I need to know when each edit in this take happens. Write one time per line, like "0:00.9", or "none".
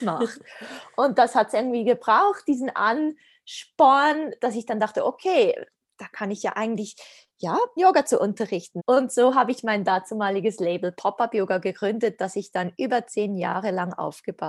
0:07.8
0:08.8